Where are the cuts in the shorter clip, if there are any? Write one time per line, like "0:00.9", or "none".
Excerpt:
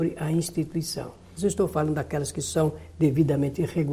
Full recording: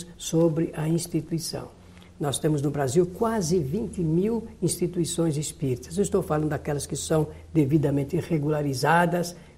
0:01.4